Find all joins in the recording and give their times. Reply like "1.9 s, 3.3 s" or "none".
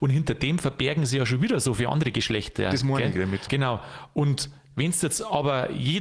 3.5 s